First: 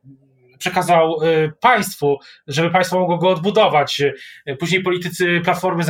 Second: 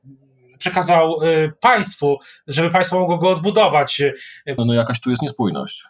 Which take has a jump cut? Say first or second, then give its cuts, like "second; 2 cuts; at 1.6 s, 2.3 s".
second; 1 cut; at 4.6 s